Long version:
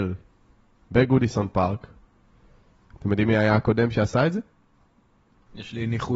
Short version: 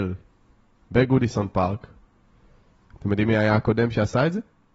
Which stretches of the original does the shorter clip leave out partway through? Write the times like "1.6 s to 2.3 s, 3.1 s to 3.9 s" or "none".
none